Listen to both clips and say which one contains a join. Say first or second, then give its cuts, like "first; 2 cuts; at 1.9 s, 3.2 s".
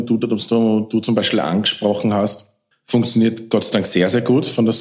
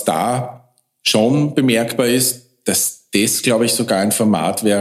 first; 1 cut; at 2.7 s